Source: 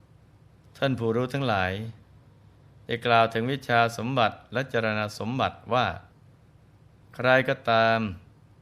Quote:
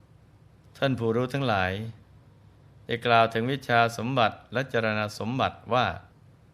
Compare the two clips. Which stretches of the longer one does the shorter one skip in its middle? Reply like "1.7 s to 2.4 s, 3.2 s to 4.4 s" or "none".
none